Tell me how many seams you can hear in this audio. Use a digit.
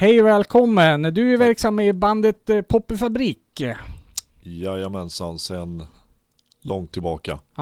0